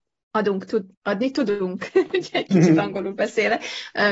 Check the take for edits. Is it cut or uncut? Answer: cut